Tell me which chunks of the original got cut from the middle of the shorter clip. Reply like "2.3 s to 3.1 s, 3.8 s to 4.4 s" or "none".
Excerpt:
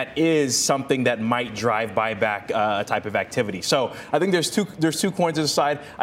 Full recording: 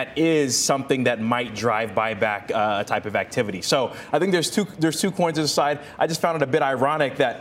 none

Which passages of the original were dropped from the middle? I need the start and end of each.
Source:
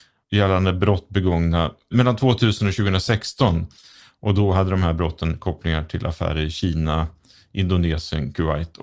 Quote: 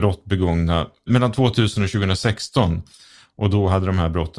none

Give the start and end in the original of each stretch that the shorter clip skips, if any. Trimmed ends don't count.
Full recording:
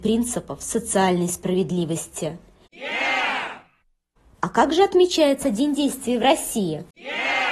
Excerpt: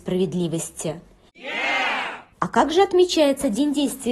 3.7 s to 4.3 s

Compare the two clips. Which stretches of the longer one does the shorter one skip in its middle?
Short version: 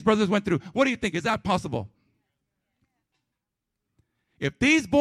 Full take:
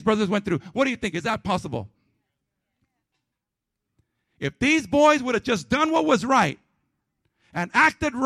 none

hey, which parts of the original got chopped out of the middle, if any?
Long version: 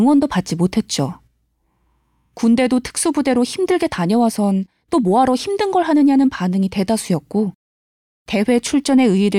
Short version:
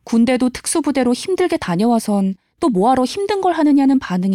none

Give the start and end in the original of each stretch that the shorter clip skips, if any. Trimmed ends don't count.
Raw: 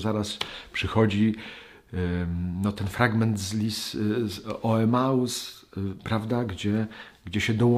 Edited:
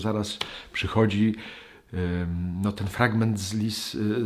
none

